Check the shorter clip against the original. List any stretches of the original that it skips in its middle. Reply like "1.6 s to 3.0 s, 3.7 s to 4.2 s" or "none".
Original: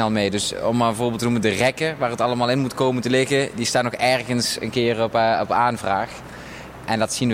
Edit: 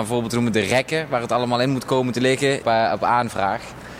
3.5 s to 5.1 s